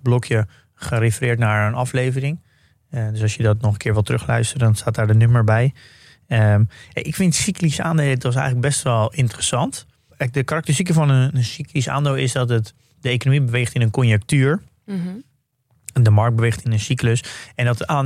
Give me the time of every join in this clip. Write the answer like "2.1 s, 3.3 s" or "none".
none